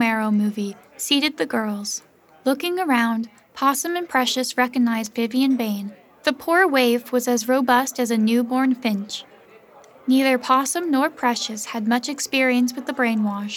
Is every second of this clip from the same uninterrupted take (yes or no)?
yes